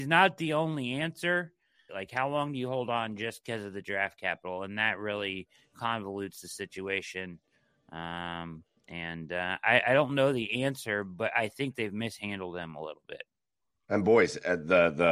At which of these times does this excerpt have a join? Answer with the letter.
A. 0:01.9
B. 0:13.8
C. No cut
A